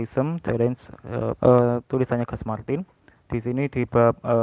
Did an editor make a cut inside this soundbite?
yes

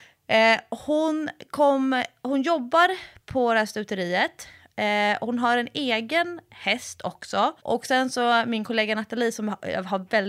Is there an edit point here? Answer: yes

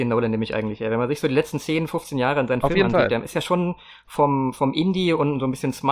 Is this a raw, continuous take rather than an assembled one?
yes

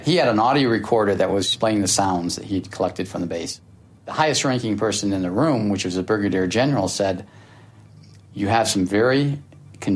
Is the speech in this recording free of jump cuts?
yes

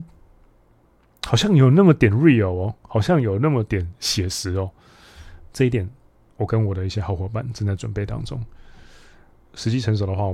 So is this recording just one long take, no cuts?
no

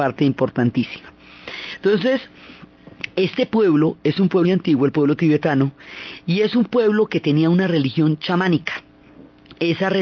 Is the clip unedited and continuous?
no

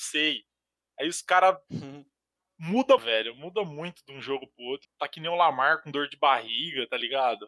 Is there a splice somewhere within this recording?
yes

